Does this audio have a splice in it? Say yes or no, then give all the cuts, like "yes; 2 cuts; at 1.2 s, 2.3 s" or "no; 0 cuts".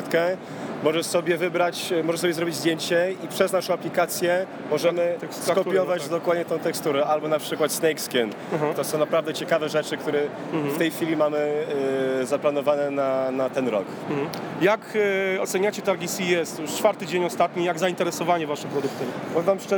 yes; 1 cut; at 8.7 s